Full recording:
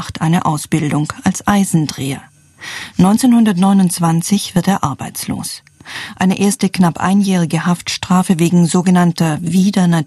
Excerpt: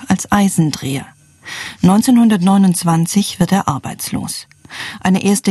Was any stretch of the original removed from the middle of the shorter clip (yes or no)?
no